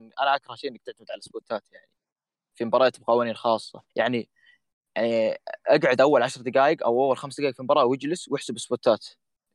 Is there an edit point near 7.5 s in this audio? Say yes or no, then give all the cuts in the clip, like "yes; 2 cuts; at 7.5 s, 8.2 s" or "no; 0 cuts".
no; 1 cut; at 3.9 s